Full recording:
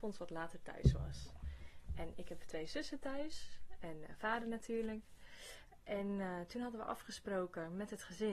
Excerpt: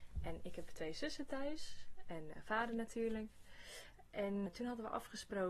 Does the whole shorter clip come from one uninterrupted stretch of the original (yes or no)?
no